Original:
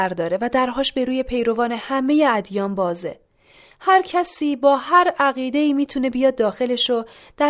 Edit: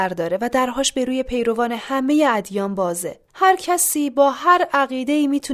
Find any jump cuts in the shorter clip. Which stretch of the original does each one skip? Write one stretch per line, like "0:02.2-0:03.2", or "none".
0:03.3-0:03.7